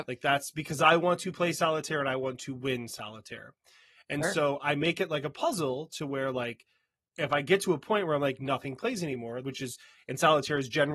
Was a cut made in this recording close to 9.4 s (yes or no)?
yes